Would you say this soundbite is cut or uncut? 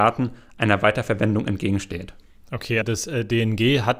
cut